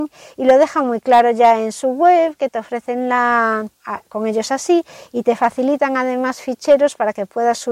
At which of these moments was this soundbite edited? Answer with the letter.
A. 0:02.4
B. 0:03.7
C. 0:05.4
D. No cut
B